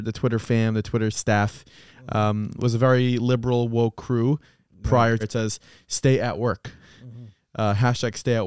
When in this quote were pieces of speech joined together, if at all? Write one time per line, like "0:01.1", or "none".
0:05.2